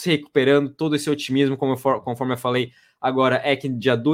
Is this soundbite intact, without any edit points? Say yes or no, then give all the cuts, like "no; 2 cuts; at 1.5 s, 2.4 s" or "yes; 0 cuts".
yes; 0 cuts